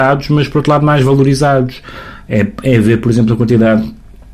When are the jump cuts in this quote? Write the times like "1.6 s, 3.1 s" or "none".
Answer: none